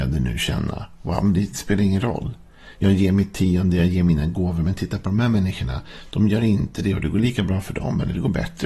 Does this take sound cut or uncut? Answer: uncut